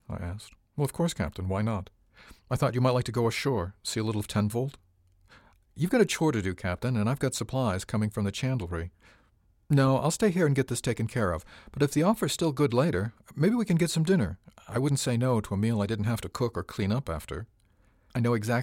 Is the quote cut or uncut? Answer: uncut